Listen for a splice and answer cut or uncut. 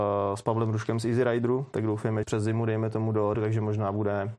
cut